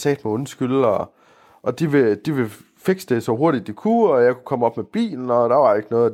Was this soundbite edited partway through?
no; 0 cuts

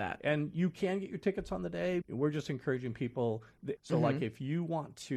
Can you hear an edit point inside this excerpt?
yes; 2 cuts; at 2.0 s, 3.8 s

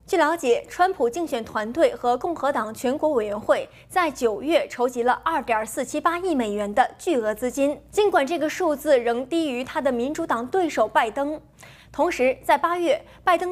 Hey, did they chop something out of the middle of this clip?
yes; 1 cut; at 11.8 s

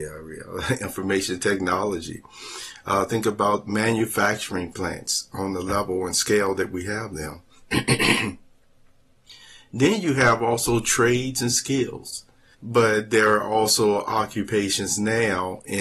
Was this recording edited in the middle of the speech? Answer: yes; 1 cut; at 12.5 s

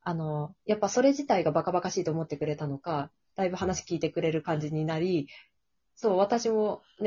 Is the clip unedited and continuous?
no; 1 cut; at 5.8 s

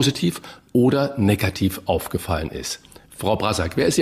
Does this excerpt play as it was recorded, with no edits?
yes; 0 cuts

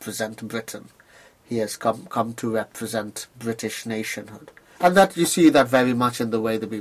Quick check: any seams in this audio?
yes; 1 cut; at 4.8 s

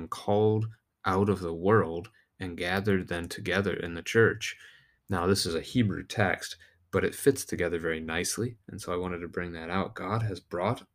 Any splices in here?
no; 0 cuts

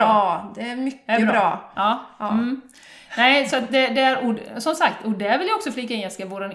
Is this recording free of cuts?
yes; 0 cuts

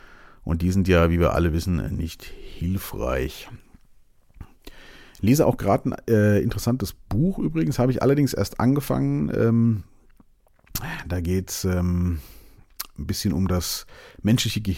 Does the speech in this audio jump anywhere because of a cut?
no; 0 cuts

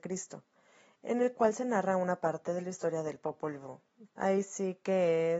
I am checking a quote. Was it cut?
yes; 1 cut; at 4.1 s

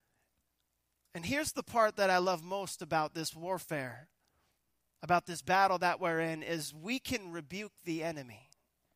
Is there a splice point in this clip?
no; 0 cuts

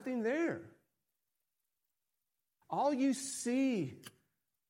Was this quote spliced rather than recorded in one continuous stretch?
no; 0 cuts

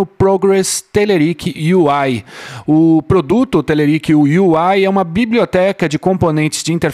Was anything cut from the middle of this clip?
no; 0 cuts

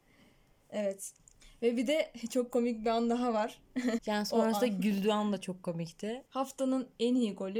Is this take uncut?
no; 2 cuts; at 4.0 s, 6.3 s

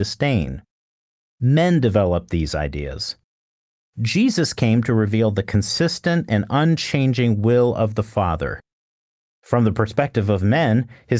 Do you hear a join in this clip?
no; 0 cuts

